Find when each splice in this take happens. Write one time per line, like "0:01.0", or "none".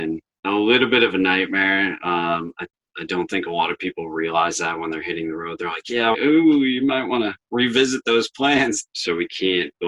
0:06.1
0:08.9